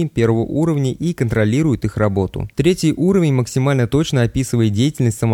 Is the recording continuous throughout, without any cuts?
no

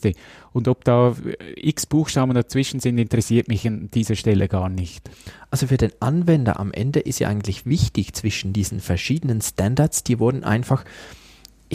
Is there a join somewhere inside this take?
no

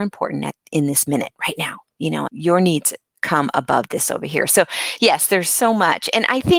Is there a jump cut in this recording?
yes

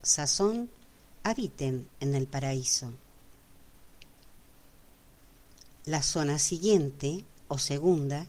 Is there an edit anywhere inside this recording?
no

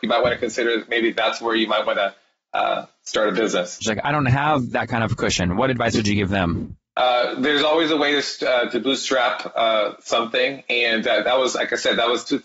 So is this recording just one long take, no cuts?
no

